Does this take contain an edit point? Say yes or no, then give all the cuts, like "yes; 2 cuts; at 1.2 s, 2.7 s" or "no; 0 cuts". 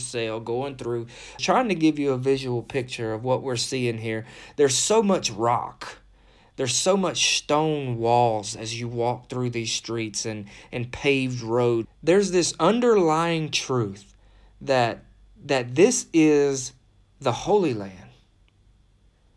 yes; 2 cuts; at 1.4 s, 11.8 s